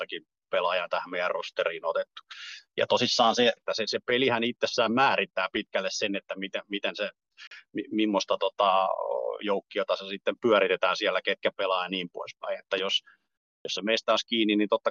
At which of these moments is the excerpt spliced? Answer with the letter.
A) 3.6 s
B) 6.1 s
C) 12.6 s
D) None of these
A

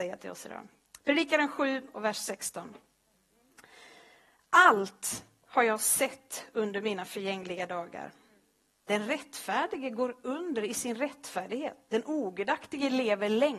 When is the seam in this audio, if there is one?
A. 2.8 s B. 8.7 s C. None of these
C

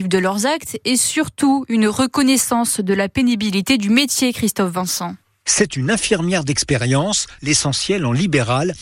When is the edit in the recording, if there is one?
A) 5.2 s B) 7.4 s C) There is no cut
B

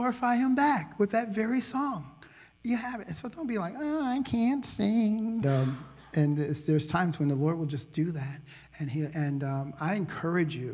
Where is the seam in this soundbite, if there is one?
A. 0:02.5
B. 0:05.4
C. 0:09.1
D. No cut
B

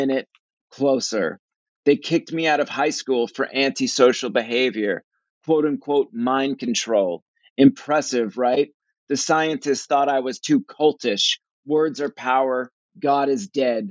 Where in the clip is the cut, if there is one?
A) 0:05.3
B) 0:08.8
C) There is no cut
C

